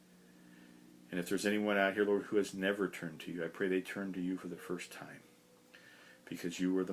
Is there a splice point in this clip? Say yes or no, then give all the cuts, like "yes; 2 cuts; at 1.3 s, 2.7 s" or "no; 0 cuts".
no; 0 cuts